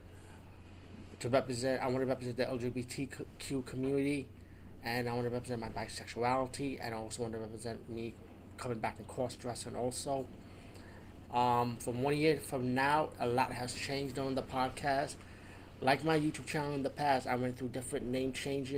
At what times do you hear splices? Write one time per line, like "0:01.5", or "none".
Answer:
0:11.3